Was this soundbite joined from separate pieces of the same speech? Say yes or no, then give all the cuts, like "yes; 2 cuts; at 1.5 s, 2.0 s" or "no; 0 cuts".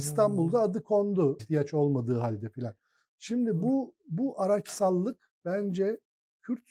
yes; 1 cut; at 1.4 s